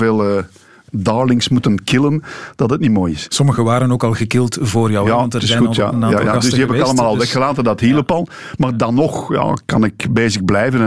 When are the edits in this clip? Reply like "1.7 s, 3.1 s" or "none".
none